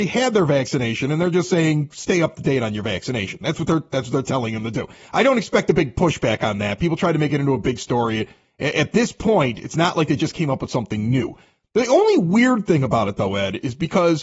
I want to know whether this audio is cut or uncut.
uncut